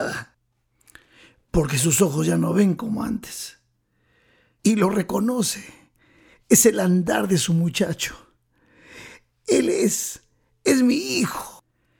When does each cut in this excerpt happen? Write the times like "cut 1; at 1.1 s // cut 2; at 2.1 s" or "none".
none